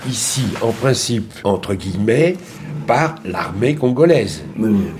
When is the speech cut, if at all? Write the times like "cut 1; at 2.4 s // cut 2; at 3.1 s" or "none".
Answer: cut 1; at 1.4 s